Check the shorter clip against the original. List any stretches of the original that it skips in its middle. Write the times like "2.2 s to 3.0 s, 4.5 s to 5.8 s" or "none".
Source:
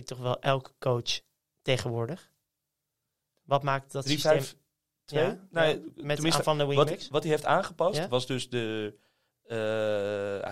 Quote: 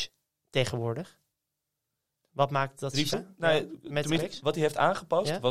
4.3 s to 5.3 s, 6.3 s to 6.9 s